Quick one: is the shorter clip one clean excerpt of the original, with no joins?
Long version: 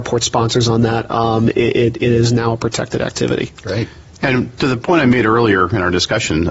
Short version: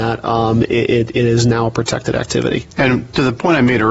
no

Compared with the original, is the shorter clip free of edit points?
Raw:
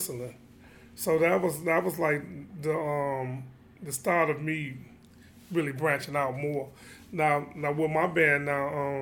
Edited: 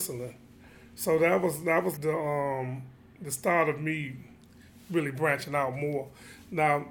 no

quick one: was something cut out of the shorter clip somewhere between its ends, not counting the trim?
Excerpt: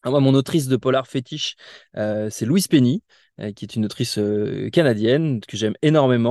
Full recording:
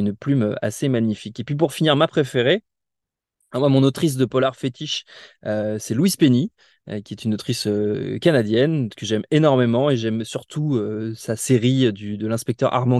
no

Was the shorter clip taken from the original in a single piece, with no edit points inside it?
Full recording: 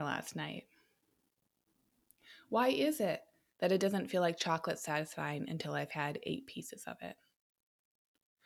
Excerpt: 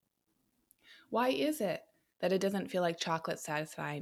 yes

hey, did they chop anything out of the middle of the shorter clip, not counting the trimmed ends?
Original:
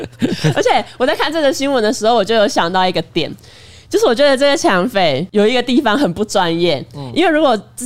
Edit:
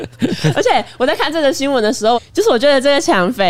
yes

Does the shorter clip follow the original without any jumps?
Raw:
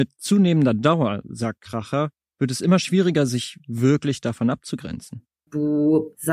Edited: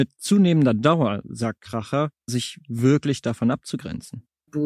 no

